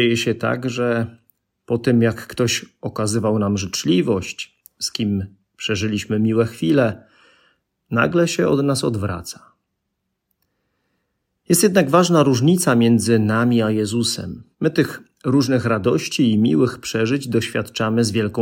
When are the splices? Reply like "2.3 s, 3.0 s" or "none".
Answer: 14.5 s